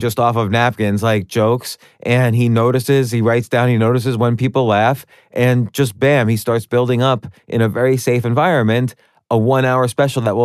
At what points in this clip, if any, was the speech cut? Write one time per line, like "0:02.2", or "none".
none